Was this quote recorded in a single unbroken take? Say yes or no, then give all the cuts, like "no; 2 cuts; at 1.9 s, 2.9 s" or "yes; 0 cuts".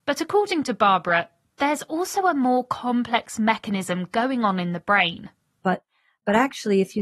no; 1 cut; at 5.6 s